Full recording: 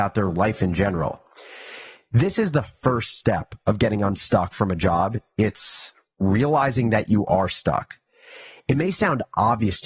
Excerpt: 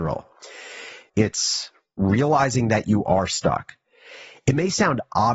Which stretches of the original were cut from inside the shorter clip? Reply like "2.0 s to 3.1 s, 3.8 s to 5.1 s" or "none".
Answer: 2.0 s to 5.3 s